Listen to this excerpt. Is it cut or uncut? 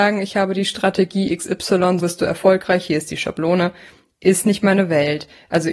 cut